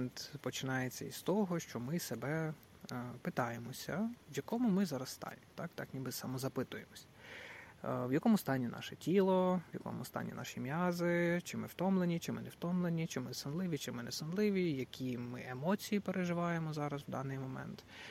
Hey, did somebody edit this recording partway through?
yes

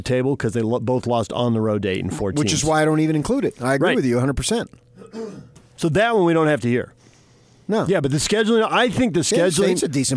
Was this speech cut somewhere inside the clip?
no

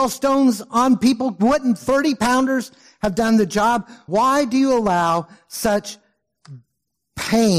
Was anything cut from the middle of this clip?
yes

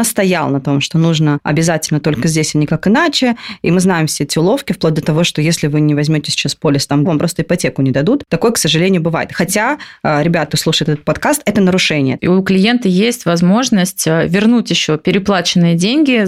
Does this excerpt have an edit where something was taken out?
yes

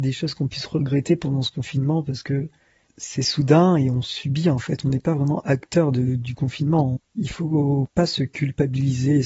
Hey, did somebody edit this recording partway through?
yes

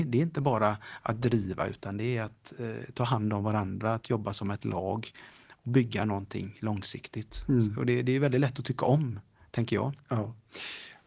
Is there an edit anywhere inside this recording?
no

